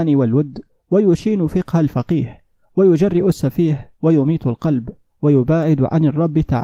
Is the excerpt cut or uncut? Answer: uncut